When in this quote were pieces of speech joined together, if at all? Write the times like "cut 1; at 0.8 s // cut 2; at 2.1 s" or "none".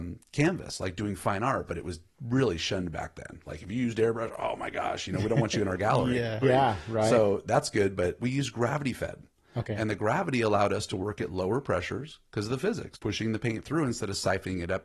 cut 1; at 6.4 s // cut 2; at 8.2 s // cut 3; at 12.9 s